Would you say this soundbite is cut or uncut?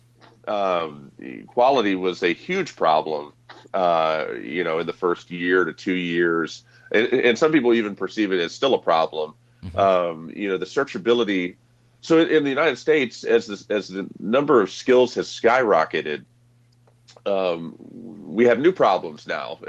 uncut